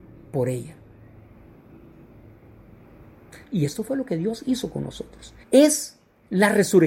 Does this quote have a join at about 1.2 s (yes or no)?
no